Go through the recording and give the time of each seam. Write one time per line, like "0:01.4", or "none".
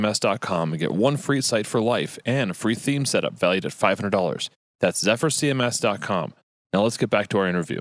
none